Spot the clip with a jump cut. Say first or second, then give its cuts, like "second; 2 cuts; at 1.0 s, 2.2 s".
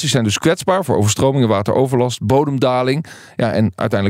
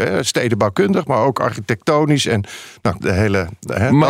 second; 1 cut; at 3.0 s